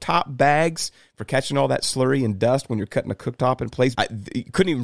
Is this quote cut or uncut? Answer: cut